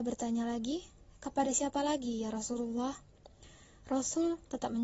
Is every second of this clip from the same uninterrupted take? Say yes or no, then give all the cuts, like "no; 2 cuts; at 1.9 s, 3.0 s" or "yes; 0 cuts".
yes; 0 cuts